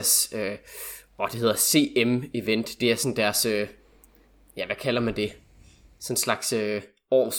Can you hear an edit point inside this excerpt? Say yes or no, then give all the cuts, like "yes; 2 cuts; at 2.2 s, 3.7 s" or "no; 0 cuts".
no; 0 cuts